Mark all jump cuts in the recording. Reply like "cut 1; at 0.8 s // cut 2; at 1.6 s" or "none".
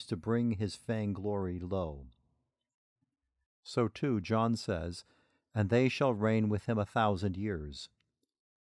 cut 1; at 3.4 s

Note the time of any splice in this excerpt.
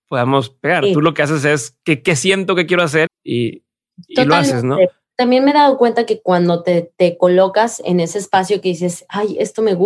cut 1; at 3.1 s

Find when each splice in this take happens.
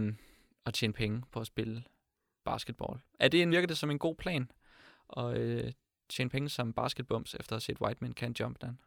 cut 1; at 3.5 s

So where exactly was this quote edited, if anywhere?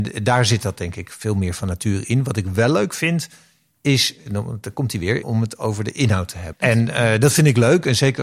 cut 1; at 5.2 s // cut 2; at 6.5 s

